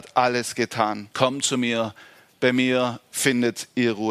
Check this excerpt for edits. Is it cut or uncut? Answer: cut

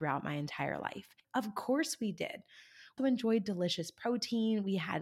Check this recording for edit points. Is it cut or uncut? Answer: cut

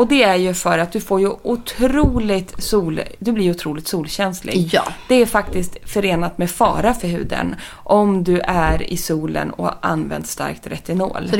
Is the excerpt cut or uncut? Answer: uncut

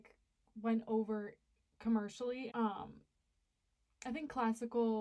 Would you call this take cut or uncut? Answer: cut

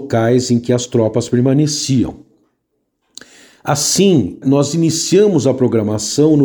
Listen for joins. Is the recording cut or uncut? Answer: cut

